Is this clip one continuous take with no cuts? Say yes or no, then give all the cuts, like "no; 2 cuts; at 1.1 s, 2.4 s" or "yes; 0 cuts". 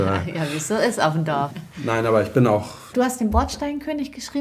no; 2 cuts; at 1.5 s, 2.9 s